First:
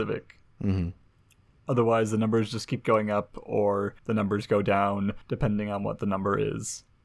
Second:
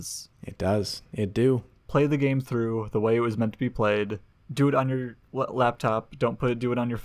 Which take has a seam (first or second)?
second